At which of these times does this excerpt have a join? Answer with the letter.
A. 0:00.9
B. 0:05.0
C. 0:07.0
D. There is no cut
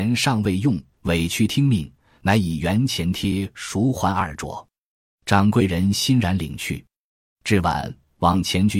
A